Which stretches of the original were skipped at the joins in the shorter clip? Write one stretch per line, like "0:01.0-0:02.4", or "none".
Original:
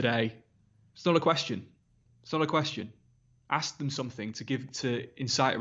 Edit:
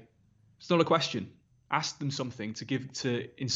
0:01.9-0:03.3